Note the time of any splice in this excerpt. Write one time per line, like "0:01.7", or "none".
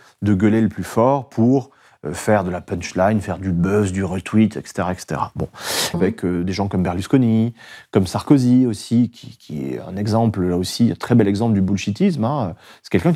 0:05.9

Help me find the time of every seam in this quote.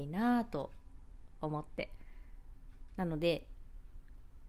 0:02.9

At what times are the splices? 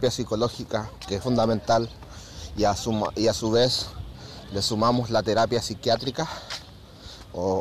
0:01.2

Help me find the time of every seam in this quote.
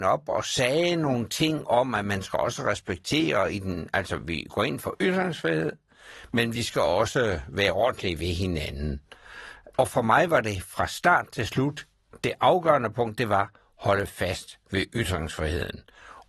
none

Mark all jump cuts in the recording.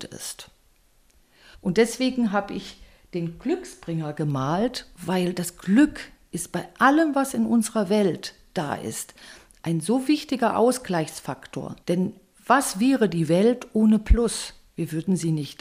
0:01.5
0:11.8

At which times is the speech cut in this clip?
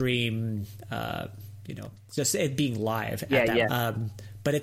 0:03.6

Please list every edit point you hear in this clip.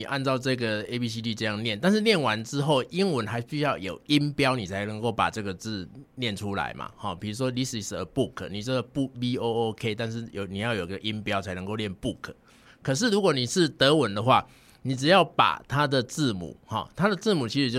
none

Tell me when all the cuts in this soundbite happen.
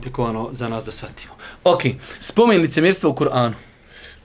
none

